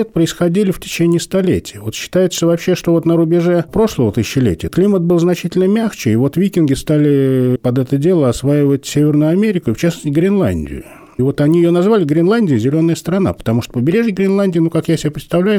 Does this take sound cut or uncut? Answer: uncut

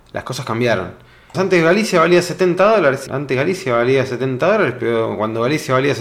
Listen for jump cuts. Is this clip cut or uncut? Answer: cut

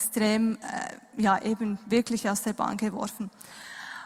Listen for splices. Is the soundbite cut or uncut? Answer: uncut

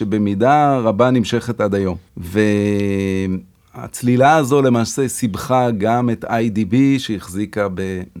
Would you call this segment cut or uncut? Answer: cut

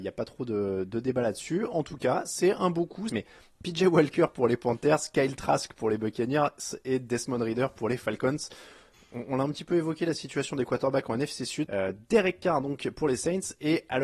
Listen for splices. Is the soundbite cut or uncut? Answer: cut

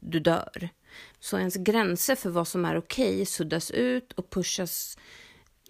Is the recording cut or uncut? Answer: cut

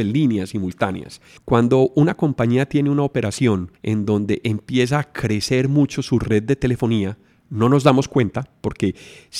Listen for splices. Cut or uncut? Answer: cut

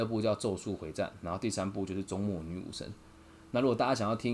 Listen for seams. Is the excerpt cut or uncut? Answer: uncut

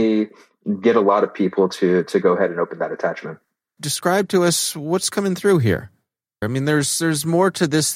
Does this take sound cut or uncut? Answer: cut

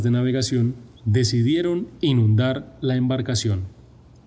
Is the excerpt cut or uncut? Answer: cut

